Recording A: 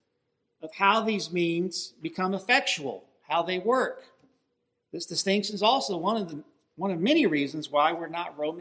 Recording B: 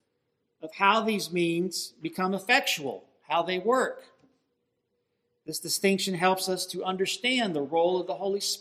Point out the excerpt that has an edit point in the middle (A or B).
A